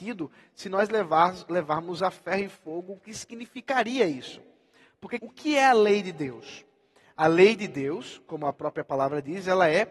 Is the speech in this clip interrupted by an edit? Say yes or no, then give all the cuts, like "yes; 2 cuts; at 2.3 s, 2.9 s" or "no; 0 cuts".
yes; 1 cut; at 5.2 s